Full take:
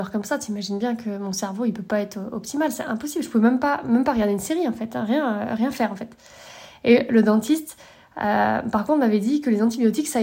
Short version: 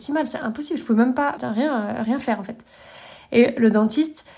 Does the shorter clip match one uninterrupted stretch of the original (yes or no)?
no